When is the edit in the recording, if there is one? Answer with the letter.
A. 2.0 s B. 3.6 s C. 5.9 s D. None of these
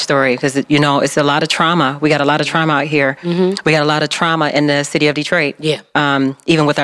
D